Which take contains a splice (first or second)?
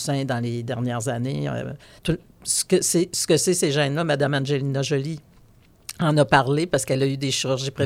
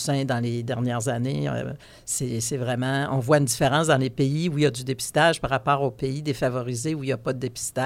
first